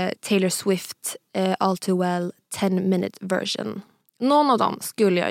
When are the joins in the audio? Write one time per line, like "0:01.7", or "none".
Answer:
none